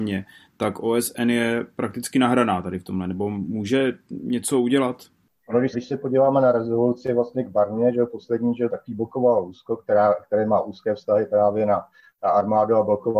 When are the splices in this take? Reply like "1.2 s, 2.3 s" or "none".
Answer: 5.7 s, 8.7 s